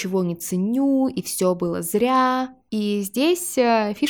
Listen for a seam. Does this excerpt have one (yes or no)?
no